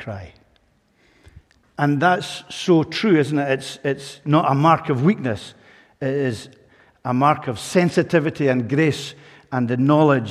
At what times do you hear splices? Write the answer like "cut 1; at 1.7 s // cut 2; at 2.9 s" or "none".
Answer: none

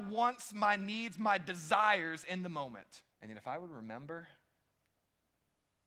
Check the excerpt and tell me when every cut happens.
cut 1; at 3.1 s

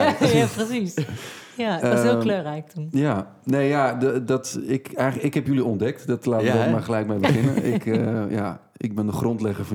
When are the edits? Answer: none

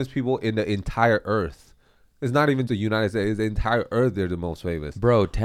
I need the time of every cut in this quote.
cut 1; at 2.7 s

